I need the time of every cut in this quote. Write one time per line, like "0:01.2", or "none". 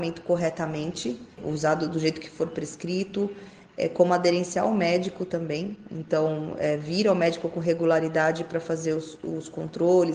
0:01.3